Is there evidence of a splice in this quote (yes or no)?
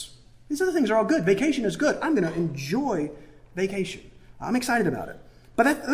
no